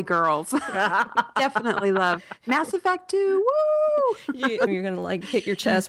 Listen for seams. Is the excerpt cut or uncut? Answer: cut